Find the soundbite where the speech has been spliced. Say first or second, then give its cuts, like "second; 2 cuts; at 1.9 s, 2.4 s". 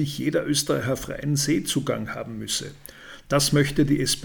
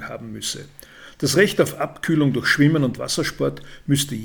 second; 1 cut; at 1.1 s